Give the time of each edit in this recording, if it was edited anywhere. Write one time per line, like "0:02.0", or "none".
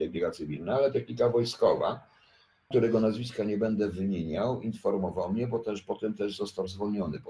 0:02.7

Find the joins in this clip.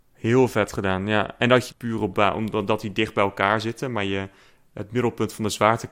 0:01.7

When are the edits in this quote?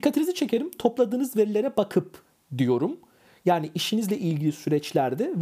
none

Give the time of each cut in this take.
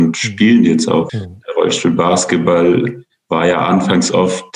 0:01.1

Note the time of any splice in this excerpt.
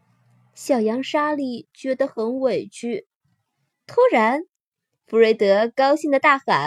0:03.7

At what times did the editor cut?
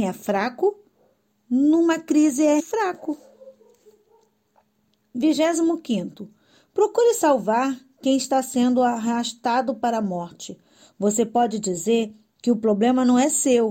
0:02.6

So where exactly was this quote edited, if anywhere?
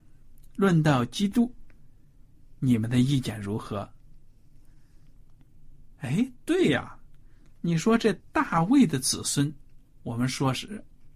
0:06.0

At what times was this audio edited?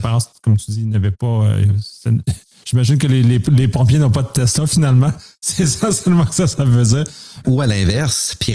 0:07.4

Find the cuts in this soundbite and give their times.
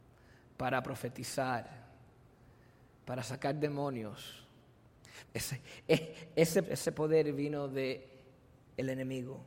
0:05.2
0:06.6

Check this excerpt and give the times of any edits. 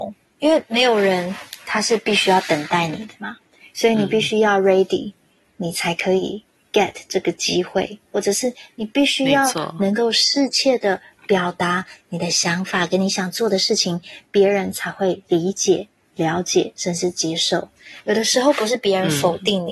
none

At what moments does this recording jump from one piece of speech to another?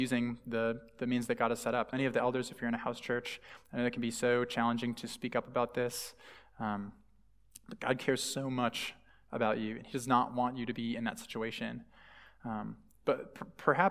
0:01.9

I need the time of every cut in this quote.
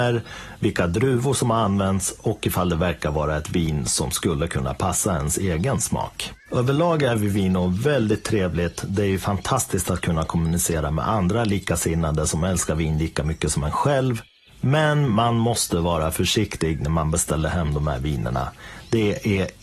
none

